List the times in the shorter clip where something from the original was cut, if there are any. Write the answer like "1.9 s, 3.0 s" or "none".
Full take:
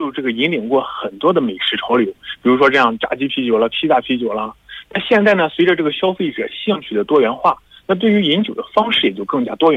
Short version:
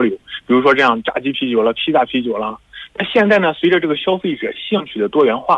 none